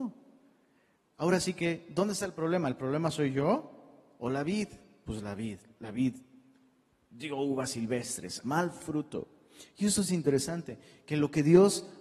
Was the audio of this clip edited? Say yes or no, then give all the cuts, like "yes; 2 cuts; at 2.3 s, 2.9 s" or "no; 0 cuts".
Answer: yes; 1 cut; at 8.4 s